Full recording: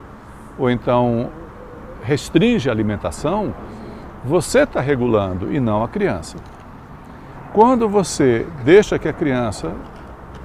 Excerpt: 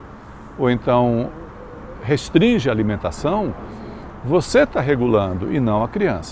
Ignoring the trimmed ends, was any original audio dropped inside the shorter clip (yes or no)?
no